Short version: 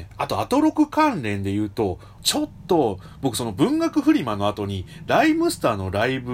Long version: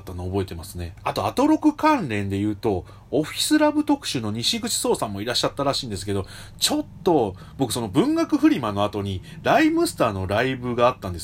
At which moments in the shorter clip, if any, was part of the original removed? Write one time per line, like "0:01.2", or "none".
0:02.2